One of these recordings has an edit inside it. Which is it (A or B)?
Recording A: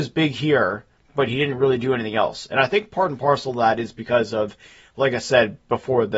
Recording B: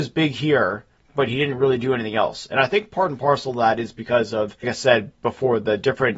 B